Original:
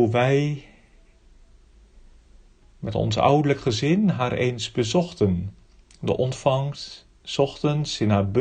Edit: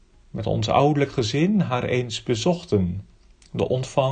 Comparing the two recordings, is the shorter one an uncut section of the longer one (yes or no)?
yes